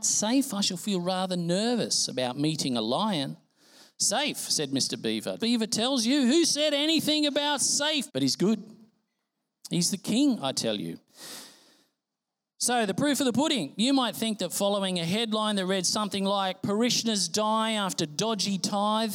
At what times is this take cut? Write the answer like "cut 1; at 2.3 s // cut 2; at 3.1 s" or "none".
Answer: cut 1; at 5.4 s // cut 2; at 8.1 s